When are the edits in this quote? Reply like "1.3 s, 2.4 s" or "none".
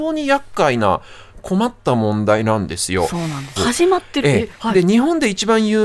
3.6 s